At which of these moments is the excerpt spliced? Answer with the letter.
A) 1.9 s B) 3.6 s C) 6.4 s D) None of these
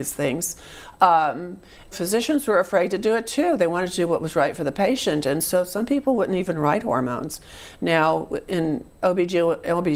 A